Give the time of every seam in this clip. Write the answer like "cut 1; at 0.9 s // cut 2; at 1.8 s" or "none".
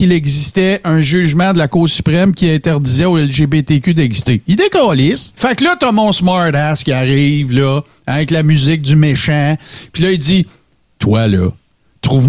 cut 1; at 5.3 s

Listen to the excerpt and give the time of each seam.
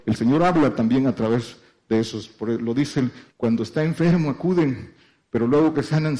cut 1; at 3.3 s

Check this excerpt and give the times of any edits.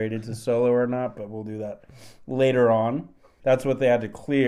cut 1; at 3.4 s

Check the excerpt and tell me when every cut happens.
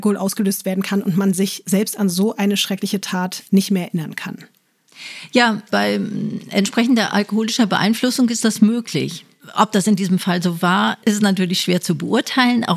none

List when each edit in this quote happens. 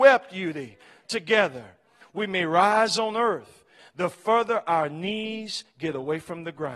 cut 1; at 2.0 s // cut 2; at 3.8 s

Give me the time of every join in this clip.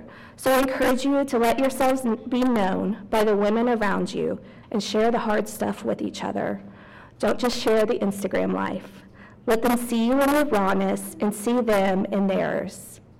cut 1; at 4.6 s

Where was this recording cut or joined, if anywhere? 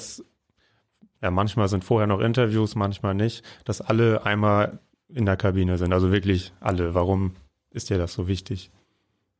none

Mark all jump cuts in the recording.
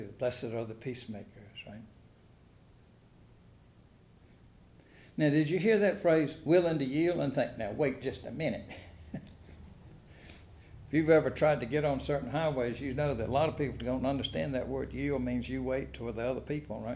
none

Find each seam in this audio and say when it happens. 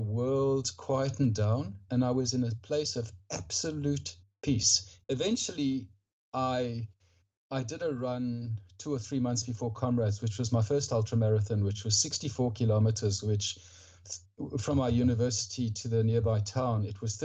cut 1; at 1.9 s // cut 2; at 5.0 s

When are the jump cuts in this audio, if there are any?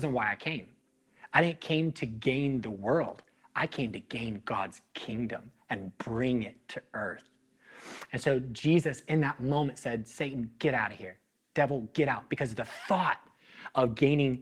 none

